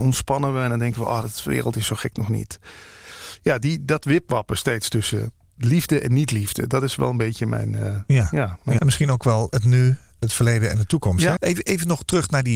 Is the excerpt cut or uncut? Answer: cut